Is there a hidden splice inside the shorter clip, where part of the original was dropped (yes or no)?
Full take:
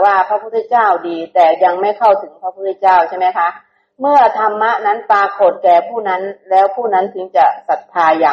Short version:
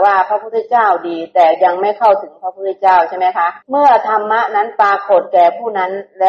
yes